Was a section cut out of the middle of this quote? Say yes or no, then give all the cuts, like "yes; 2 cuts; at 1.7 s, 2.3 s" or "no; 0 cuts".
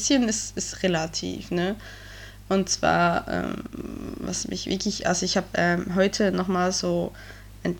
no; 0 cuts